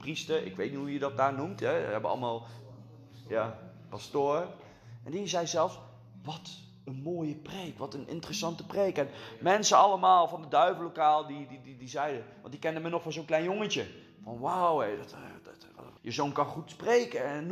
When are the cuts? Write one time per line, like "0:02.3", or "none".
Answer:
0:16.0